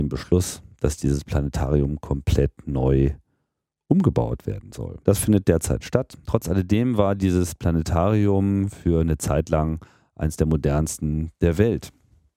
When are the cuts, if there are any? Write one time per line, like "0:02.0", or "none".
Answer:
0:05.0
0:06.2